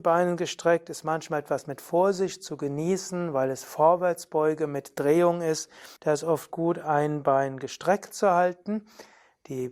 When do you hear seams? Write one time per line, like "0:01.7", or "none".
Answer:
0:06.0